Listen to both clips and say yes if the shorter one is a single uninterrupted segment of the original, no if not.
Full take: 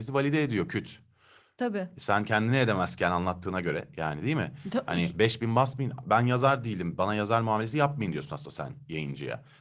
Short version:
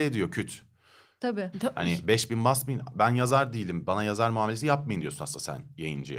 no